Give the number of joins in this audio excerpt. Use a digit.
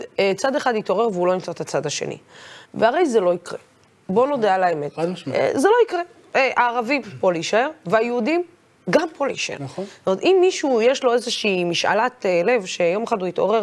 0